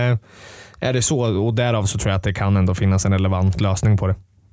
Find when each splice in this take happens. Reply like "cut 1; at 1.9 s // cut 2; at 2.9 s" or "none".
none